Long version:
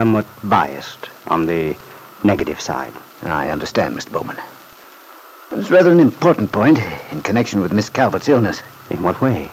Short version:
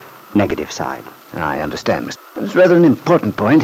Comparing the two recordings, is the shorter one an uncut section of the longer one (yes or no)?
no